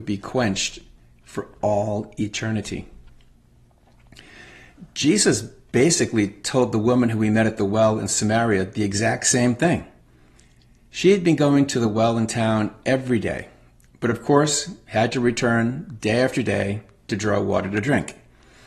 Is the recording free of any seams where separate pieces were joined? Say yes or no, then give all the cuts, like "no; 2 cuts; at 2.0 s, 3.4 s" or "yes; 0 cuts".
yes; 0 cuts